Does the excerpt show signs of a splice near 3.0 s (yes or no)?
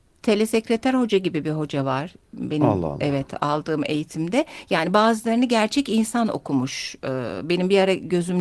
no